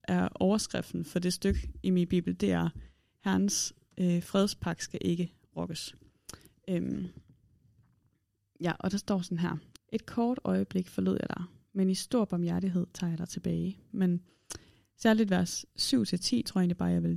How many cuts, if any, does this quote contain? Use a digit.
2